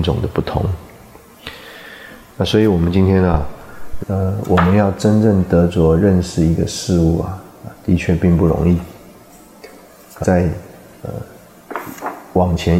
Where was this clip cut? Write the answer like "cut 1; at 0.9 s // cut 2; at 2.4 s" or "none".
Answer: cut 1; at 4.0 s // cut 2; at 10.2 s